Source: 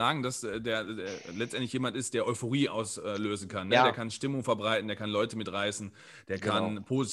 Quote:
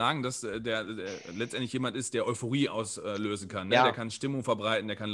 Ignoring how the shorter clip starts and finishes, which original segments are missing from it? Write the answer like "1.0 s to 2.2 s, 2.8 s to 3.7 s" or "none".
none

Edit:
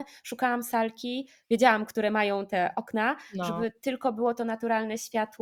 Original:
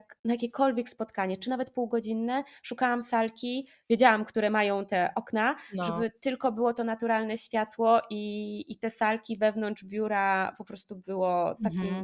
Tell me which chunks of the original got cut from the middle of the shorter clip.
none

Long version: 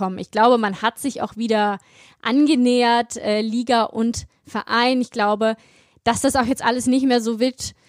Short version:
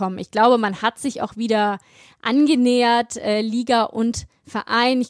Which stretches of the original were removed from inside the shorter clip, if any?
none

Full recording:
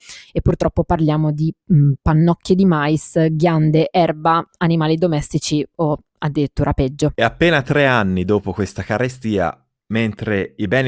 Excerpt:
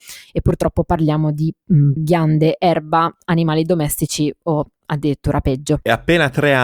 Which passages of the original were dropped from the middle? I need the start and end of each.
2.0 s to 3.3 s

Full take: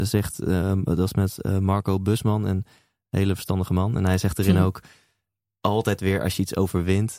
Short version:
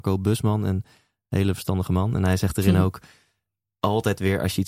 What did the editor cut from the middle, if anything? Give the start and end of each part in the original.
none

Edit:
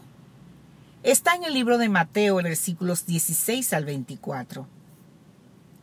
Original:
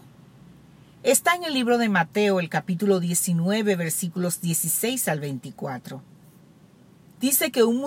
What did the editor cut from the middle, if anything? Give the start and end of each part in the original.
2.4 s to 3.8 s

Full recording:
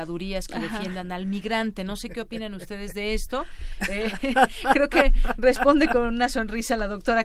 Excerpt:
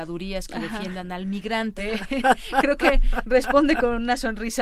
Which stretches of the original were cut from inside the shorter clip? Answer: 1.8 s to 3.9 s

